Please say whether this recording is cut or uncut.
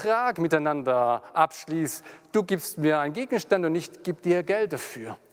uncut